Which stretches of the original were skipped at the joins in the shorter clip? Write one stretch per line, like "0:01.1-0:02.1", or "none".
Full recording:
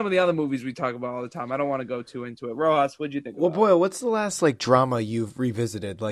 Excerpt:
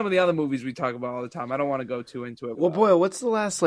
0:02.5-0:03.3